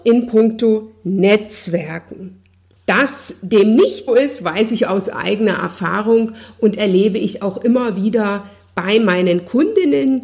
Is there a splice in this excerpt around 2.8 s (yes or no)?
yes